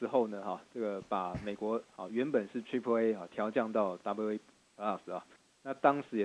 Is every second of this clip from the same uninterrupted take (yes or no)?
yes